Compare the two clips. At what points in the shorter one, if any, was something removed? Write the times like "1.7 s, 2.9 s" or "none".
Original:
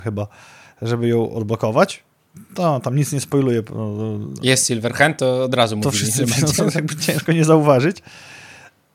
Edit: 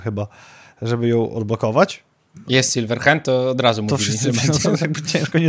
2.5 s